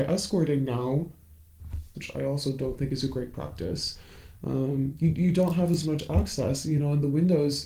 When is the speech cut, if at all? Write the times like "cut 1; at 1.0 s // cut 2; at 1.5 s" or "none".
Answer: cut 1; at 1.9 s